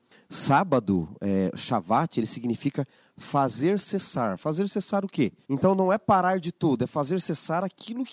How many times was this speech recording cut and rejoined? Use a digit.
1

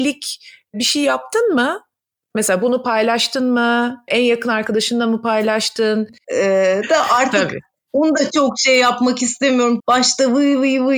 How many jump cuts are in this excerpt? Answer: 2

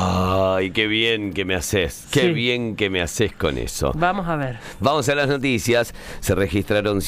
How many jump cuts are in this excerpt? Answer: 0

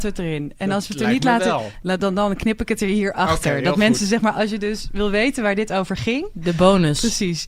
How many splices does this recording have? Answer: 0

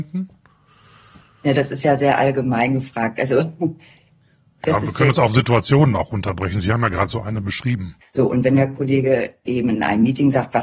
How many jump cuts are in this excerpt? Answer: 2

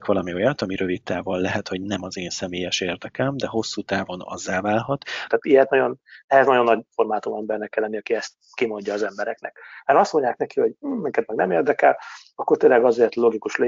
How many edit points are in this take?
1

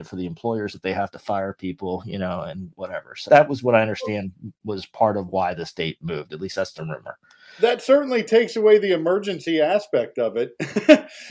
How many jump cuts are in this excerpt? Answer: 1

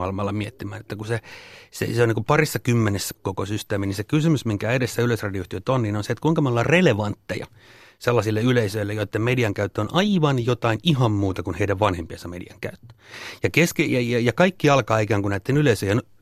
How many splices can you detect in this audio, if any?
1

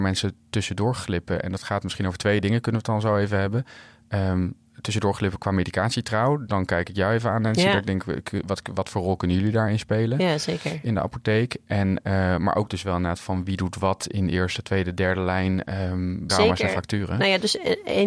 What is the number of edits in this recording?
1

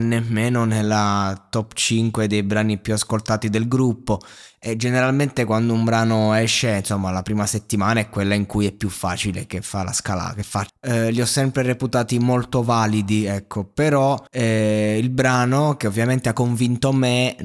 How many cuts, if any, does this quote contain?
2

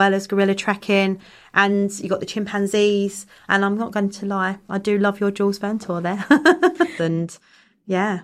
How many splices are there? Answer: 2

